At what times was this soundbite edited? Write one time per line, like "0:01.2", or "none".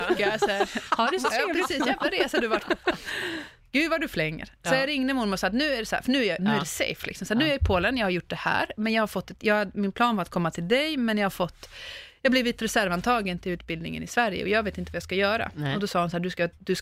0:06.4